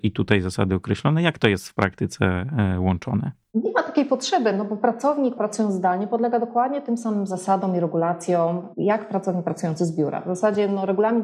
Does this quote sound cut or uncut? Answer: uncut